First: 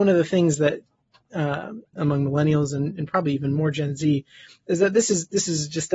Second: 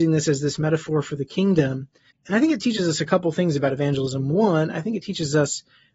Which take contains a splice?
first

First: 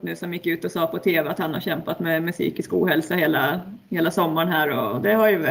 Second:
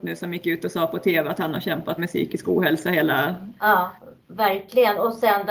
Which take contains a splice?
second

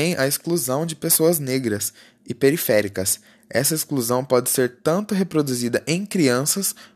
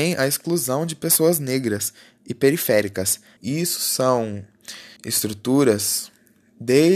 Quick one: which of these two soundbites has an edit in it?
second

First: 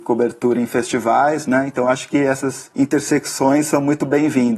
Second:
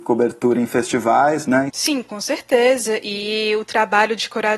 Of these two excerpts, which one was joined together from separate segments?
second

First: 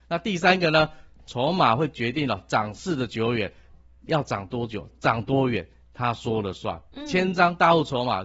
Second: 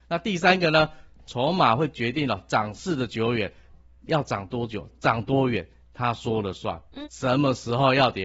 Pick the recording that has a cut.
second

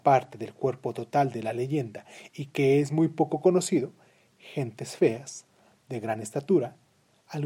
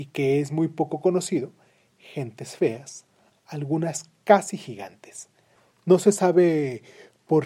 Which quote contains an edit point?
second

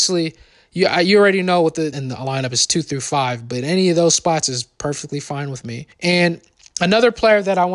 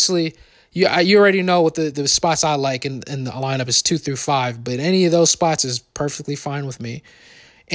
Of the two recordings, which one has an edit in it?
first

